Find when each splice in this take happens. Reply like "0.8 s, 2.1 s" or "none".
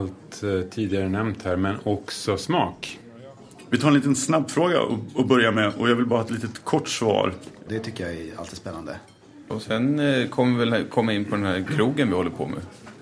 7.7 s, 9.5 s